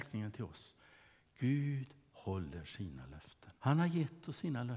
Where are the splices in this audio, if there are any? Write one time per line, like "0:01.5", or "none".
0:03.6